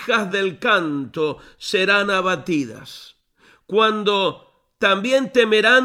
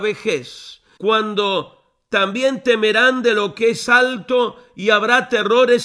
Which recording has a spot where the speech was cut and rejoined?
second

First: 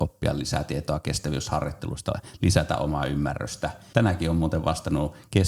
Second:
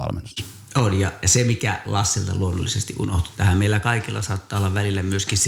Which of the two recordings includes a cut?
first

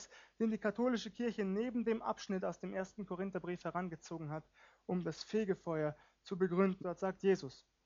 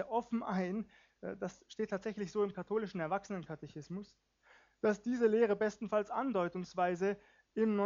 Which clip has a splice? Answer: first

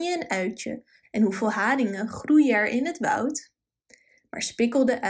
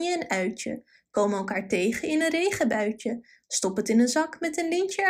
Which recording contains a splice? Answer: first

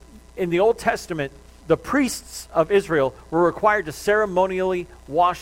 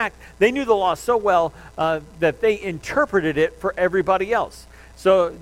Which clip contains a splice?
first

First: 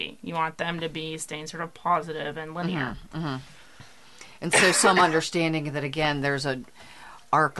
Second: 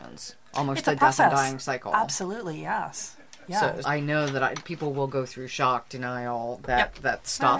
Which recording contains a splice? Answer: second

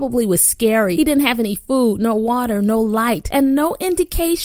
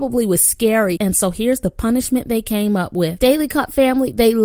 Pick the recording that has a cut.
second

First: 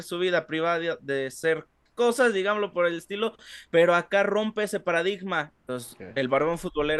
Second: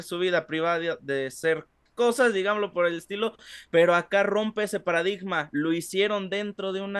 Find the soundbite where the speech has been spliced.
first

